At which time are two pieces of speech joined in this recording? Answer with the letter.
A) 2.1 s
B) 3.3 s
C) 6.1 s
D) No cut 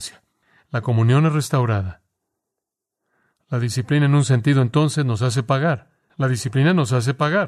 C